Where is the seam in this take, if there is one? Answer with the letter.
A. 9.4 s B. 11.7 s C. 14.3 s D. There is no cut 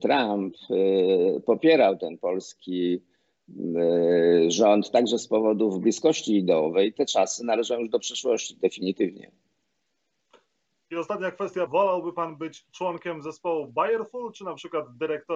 B